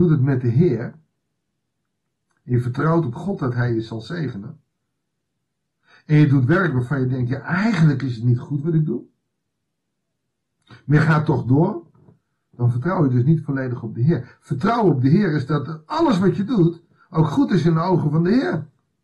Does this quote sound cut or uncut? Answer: uncut